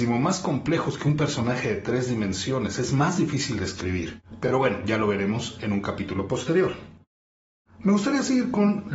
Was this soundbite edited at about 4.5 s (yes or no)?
no